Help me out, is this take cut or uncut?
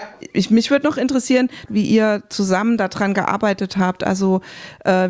cut